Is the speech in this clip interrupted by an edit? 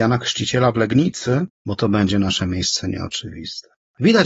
yes; 1 cut; at 1.6 s

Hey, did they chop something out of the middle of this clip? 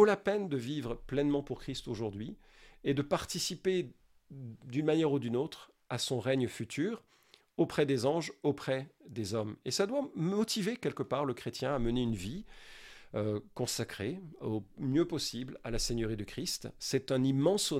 no; 0 cuts

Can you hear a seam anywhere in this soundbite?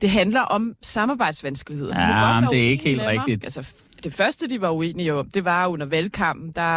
yes; 1 cut; at 3.4 s

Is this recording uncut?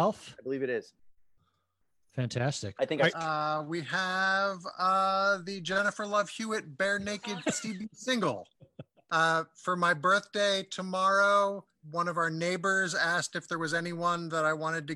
no; 3 cuts; at 3.1 s, 9.0 s, 11.8 s

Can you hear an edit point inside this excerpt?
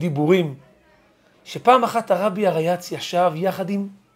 yes; 1 cut; at 1.3 s

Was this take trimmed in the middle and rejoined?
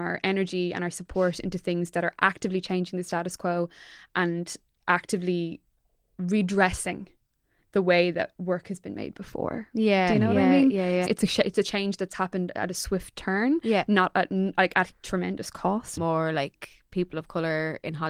yes; 2 cuts; at 11.1 s, 16.0 s

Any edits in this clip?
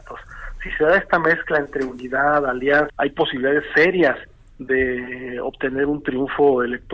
yes; 1 cut; at 2.9 s

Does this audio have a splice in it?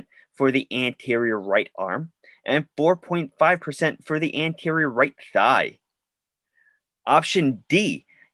no; 0 cuts

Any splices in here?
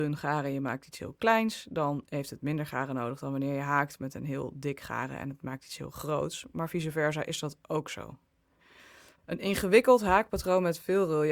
no; 0 cuts

